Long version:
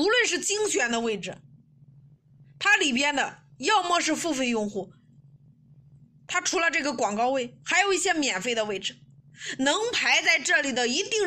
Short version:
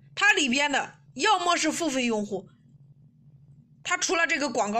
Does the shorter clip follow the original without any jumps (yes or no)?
yes